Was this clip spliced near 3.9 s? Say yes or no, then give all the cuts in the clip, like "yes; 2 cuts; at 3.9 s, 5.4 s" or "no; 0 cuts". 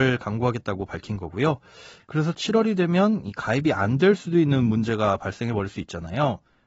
no; 1 cut; at 2.0 s